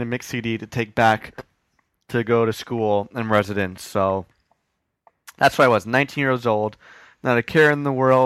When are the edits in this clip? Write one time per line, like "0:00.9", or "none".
none